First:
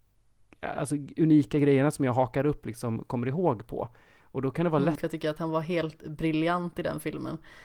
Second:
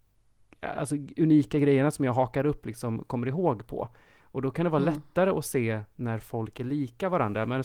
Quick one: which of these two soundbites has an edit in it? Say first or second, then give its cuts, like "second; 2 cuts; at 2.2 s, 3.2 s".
first; 1 cut; at 5.0 s